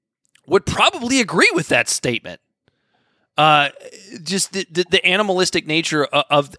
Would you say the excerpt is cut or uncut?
uncut